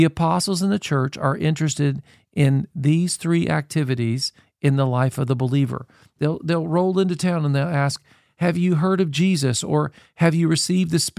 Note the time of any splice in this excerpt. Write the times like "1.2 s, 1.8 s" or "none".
none